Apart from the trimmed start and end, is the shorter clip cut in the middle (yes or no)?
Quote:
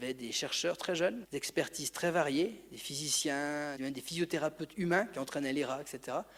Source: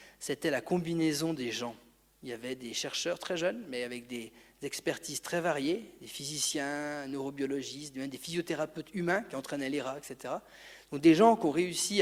yes